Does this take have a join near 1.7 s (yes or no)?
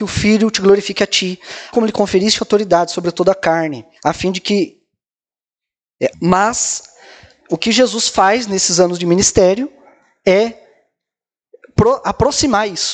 yes